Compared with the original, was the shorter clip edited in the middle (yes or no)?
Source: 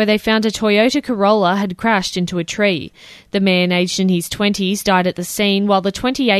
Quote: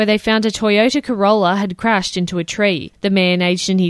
yes